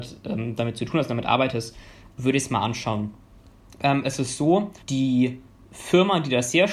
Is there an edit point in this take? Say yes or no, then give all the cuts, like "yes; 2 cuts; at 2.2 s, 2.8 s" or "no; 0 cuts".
yes; 1 cut; at 4.8 s